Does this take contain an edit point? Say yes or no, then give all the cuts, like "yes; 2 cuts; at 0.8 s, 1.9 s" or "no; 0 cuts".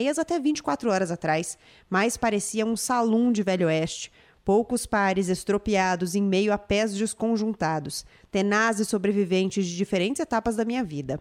no; 0 cuts